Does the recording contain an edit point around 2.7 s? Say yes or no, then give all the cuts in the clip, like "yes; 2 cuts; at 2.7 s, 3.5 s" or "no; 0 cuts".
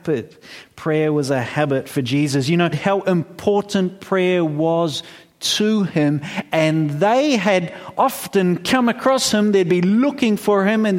yes; 1 cut; at 2.7 s